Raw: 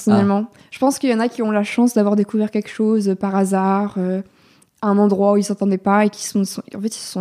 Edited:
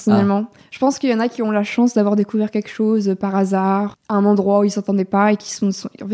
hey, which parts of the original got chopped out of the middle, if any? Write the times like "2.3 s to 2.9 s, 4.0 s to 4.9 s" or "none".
3.9 s to 4.7 s